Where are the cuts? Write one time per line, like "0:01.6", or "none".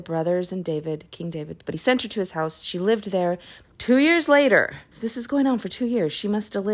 0:01.6
0:03.6
0:04.9